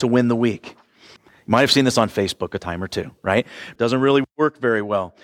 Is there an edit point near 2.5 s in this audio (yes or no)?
no